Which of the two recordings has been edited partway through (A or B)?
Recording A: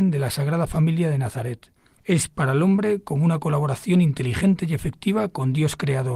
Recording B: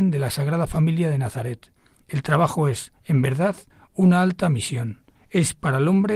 A